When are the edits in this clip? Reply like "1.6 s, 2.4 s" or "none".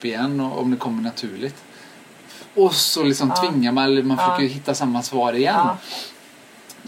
2.5 s